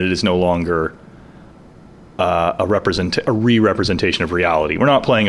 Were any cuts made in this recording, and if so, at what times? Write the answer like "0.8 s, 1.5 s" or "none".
none